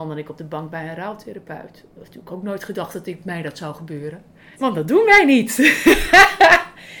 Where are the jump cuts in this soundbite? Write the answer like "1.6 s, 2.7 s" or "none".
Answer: 4.5 s